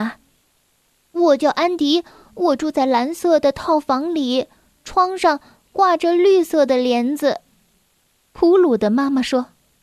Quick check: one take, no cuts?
yes; 0 cuts

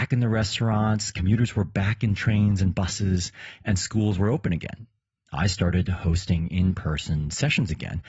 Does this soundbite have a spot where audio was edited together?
no; 0 cuts

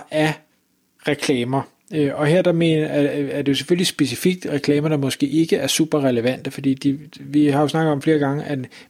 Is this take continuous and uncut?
no; 1 cut; at 7.1 s

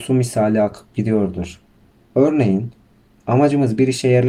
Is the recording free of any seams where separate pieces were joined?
no; 1 cut; at 2.0 s

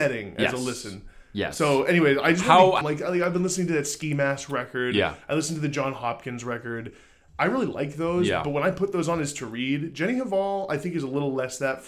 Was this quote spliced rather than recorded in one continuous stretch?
yes; 1 cut; at 2.8 s

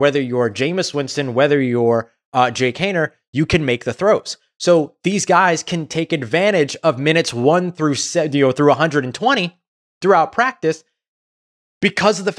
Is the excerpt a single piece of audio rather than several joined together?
yes; 0 cuts

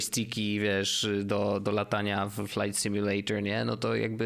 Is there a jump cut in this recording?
no; 0 cuts

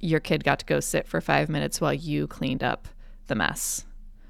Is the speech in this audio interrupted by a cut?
no; 0 cuts

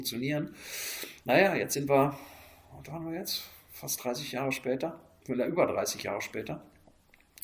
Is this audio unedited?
yes; 0 cuts

